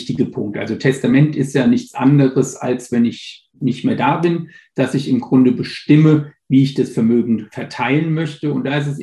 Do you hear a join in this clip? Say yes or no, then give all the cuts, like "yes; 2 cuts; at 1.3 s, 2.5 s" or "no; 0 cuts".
no; 0 cuts